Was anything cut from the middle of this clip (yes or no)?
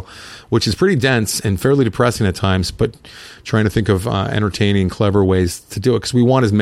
no